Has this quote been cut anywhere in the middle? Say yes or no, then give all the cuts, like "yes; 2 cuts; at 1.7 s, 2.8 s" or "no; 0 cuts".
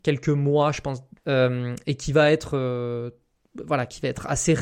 yes; 1 cut; at 1.2 s